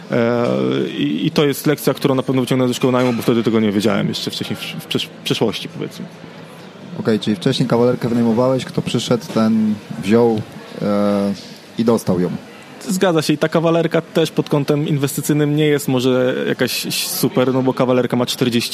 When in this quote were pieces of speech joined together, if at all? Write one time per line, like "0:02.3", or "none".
none